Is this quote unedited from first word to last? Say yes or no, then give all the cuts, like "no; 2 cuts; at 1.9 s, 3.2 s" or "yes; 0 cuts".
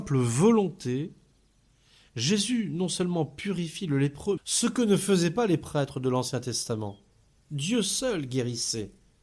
no; 1 cut; at 4.4 s